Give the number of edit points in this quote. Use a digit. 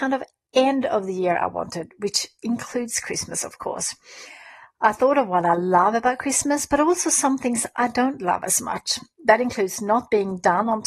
0